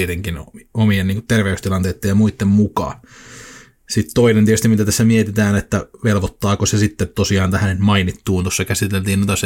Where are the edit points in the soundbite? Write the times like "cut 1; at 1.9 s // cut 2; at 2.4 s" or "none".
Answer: none